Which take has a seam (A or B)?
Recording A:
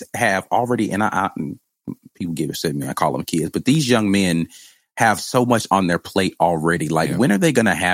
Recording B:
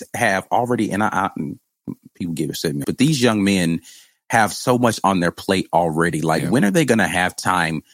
B